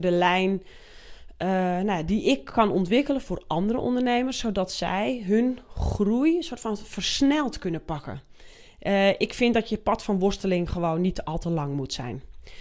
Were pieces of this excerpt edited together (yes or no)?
no